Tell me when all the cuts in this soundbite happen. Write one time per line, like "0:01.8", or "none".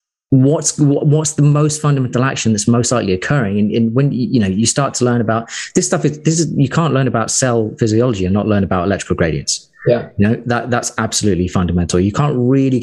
none